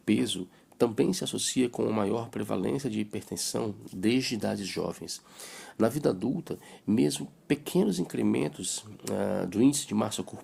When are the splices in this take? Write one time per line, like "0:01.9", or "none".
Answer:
none